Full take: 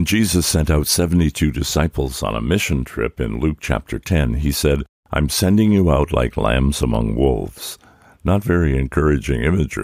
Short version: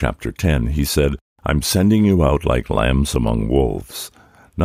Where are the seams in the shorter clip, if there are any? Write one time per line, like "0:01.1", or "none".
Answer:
none